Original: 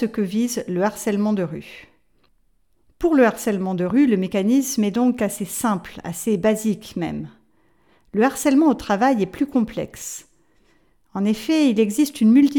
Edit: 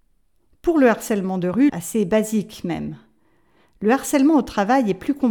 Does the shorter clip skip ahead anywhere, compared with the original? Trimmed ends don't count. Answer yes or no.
yes